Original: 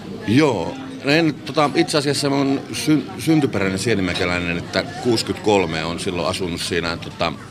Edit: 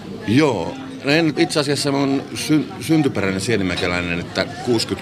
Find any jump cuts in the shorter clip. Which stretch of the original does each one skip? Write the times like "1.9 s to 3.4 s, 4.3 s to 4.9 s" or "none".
1.3 s to 1.7 s